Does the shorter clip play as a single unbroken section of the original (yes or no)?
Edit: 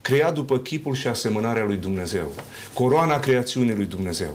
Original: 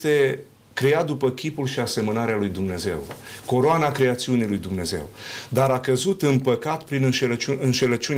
yes